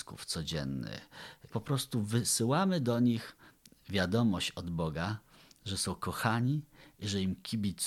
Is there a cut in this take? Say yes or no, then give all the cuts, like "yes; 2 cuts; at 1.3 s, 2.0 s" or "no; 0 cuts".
yes; 1 cut; at 1.5 s